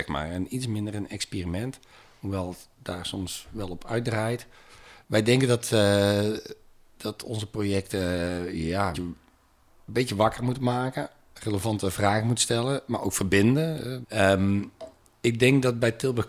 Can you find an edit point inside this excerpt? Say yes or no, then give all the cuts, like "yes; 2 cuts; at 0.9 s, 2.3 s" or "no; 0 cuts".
yes; 2 cuts; at 8.9 s, 14.0 s